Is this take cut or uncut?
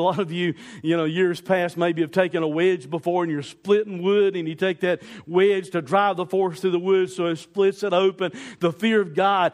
uncut